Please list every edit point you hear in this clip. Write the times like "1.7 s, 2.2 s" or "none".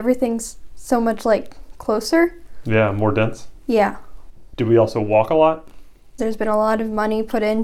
6.2 s